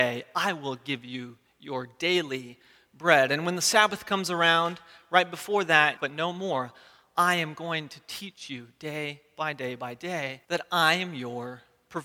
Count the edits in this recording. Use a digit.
2